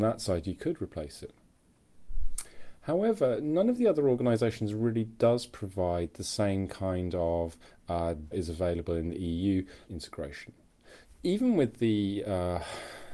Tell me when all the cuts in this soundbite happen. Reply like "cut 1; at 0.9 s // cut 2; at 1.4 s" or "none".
cut 1; at 8.3 s // cut 2; at 9.9 s // cut 3; at 11.0 s